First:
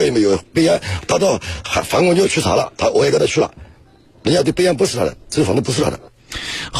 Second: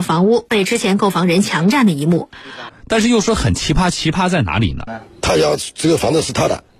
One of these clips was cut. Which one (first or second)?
second